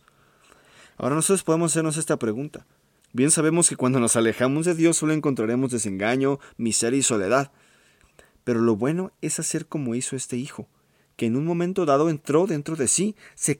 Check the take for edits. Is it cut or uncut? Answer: cut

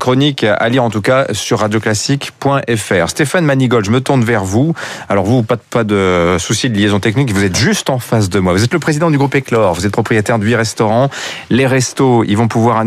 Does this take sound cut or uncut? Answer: uncut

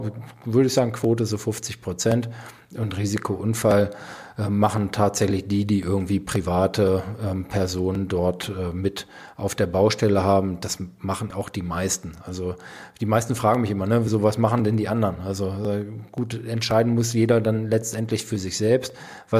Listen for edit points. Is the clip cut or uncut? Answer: cut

